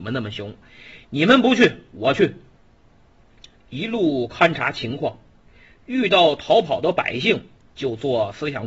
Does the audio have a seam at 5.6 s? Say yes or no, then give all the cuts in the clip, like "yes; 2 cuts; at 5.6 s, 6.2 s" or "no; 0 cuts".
no; 1 cut; at 3.5 s